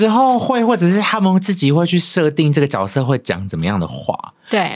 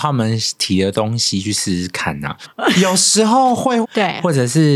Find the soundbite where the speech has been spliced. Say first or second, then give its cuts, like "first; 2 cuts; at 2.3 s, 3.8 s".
second; 2 cuts; at 2.4 s, 3.8 s